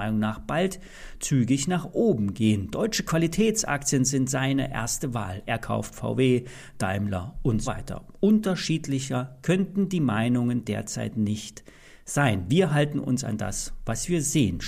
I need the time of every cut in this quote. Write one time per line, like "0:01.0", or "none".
0:07.6